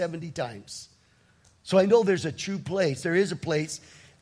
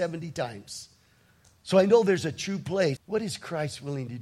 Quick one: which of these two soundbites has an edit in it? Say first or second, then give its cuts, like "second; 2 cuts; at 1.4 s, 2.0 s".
second; 1 cut; at 3.0 s